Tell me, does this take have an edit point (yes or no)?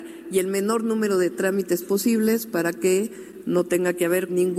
no